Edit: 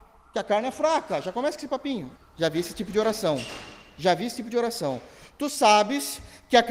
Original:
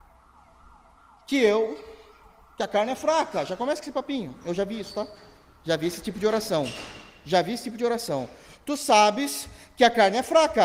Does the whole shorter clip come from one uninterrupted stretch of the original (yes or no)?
no